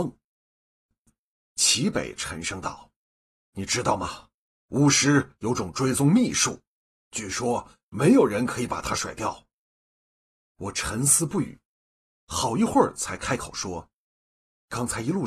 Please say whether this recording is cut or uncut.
cut